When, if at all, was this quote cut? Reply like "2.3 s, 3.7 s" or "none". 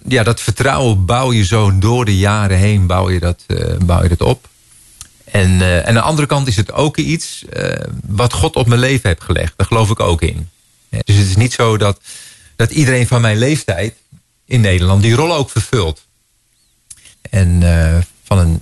11.0 s, 17.1 s